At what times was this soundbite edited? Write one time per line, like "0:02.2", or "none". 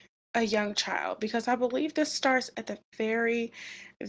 none